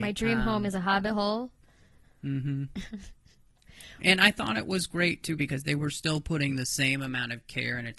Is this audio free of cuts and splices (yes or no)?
yes